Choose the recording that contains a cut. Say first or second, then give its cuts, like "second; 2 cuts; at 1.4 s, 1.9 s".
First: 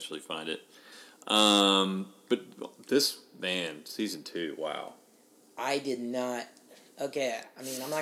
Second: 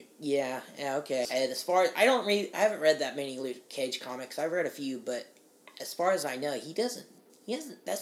second; 1 cut; at 1.2 s